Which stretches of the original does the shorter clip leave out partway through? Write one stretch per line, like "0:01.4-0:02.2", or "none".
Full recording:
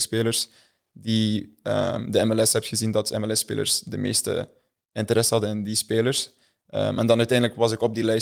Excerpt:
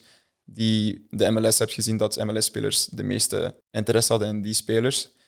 0:01.6-0:02.1
0:04.5-0:04.8